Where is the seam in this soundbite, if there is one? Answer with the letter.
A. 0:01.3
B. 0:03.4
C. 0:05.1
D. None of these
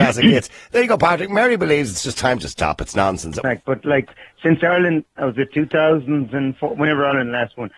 B